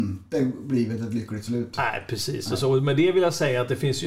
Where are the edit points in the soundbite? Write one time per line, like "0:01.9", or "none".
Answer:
none